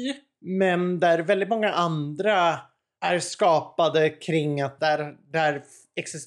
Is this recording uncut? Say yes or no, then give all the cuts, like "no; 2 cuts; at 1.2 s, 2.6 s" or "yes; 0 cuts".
no; 1 cut; at 4.8 s